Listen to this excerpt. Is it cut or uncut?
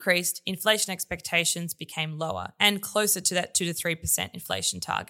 uncut